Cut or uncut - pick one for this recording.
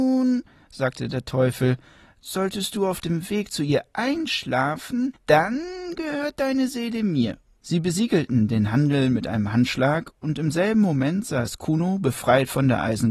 cut